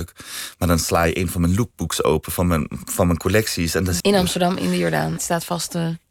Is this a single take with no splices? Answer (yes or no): no